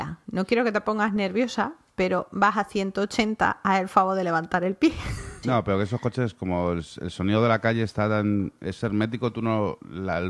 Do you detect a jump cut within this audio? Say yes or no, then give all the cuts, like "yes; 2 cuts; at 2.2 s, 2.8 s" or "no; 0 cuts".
yes; 1 cut; at 5.4 s